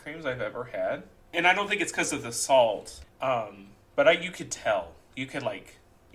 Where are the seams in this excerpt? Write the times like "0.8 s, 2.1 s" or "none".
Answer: 1.2 s, 3.0 s